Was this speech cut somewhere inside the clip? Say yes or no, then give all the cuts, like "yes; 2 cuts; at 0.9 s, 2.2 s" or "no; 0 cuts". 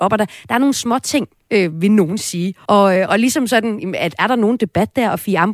yes; 1 cut; at 2.7 s